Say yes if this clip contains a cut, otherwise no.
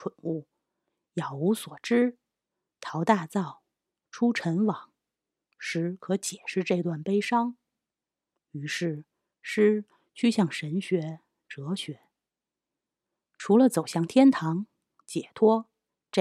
yes